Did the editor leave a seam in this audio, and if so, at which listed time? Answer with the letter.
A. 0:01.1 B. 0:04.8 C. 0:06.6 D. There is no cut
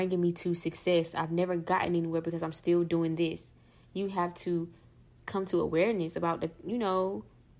A